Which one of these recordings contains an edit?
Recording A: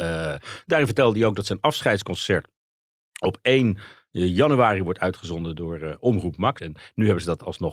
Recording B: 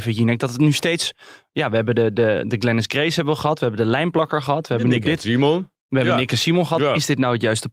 A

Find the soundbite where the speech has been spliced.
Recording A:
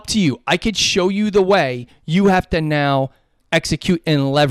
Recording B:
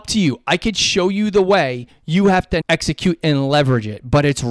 B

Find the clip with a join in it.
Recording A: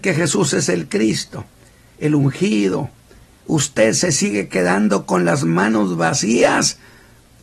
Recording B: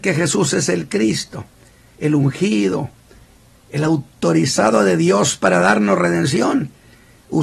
A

